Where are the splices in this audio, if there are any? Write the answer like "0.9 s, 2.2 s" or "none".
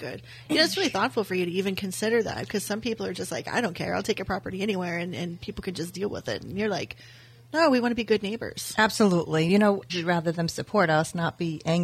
9.9 s